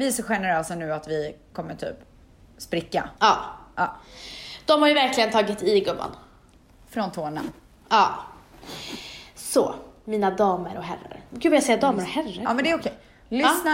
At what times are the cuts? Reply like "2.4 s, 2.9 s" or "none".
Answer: 3.1 s